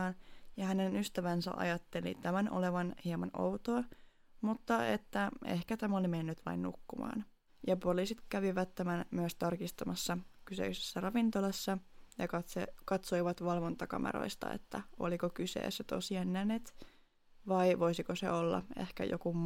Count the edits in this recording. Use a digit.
1